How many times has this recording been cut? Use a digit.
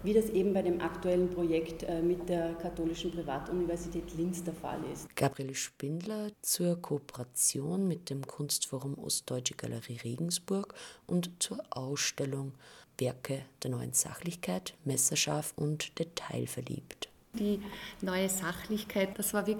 2